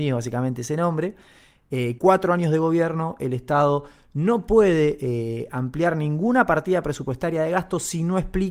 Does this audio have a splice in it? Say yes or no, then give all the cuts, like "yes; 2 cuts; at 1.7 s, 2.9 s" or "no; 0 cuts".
yes; 1 cut; at 2.0 s